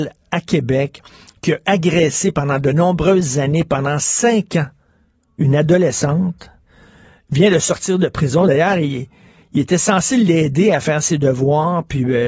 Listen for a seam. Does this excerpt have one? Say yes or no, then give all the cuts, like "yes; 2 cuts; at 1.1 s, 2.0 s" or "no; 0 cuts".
no; 0 cuts